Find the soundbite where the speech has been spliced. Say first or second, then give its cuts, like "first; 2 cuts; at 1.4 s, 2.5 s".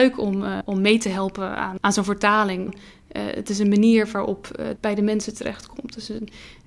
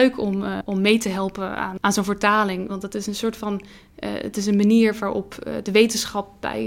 first; 2 cuts; at 2.7 s, 4.8 s